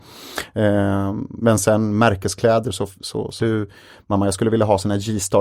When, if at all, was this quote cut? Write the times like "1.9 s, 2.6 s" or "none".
3.4 s